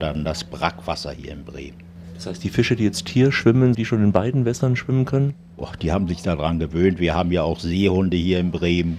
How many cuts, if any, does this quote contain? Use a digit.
1